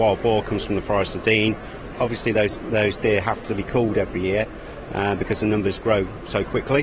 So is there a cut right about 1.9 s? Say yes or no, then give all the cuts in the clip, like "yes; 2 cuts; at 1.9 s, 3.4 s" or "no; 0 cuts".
yes; 1 cut; at 1.9 s